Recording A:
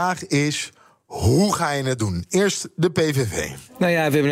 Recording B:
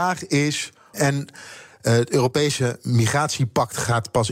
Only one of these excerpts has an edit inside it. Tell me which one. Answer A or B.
B